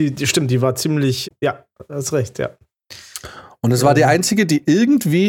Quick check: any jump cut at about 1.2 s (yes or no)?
yes